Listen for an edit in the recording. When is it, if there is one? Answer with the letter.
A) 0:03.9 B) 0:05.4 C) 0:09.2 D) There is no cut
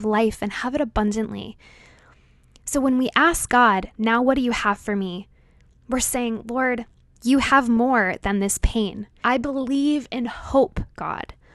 C